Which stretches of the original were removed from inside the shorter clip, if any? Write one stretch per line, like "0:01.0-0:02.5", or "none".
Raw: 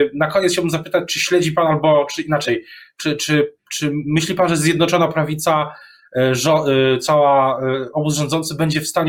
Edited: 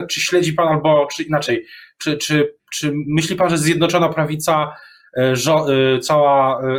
none